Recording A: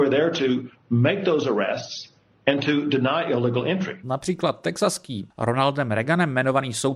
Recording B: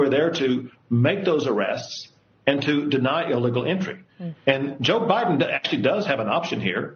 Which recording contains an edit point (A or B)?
A